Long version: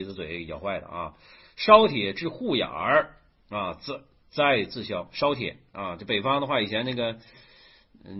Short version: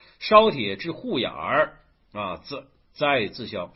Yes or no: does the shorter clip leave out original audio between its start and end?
no